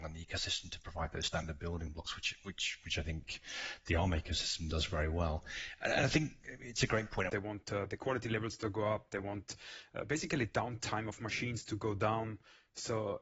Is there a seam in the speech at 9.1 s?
no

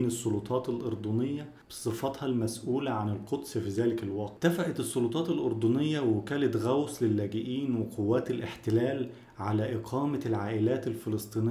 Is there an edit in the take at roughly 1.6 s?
yes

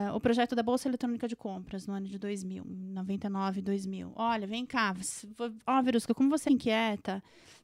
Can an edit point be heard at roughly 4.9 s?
no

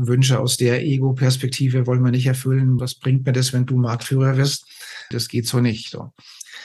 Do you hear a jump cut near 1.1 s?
no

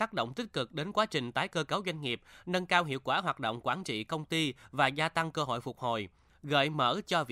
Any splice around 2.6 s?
no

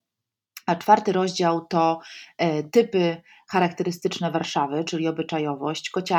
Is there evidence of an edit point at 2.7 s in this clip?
no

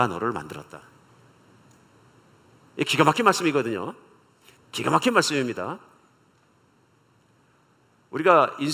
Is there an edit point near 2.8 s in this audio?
no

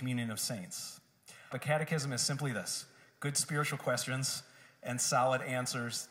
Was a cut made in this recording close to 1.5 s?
yes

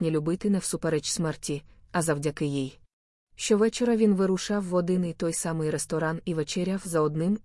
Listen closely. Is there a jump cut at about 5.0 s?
no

